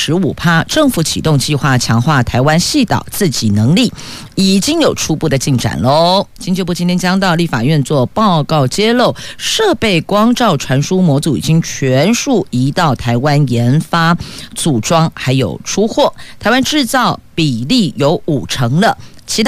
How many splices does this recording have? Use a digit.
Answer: 0